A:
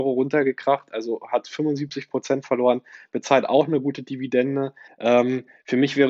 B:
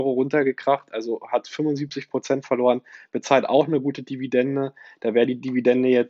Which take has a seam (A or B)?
A